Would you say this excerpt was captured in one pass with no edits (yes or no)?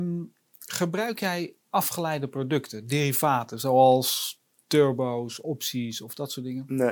yes